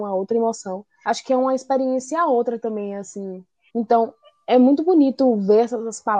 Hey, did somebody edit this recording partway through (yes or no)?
yes